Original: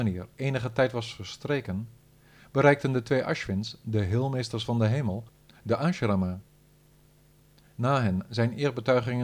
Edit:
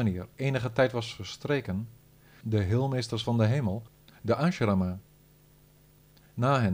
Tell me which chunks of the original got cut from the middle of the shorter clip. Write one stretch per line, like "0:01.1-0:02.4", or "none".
0:02.4-0:03.8